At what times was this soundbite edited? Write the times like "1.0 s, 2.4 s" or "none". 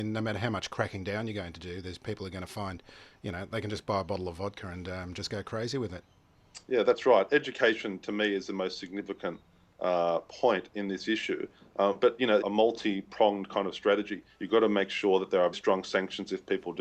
12.4 s, 14.3 s, 15.5 s